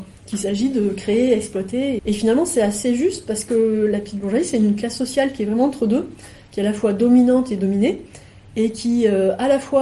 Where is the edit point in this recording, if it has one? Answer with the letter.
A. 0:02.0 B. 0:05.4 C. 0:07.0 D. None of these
A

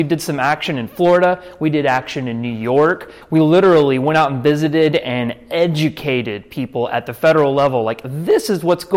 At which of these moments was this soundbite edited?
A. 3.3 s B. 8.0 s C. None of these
C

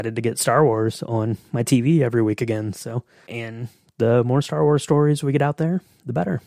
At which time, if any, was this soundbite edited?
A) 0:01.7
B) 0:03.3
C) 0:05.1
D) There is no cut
B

